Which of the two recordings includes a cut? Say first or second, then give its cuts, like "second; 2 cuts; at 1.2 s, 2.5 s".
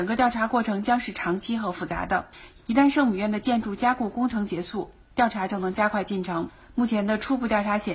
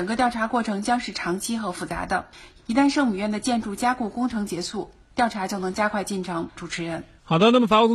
second; 1 cut; at 6.6 s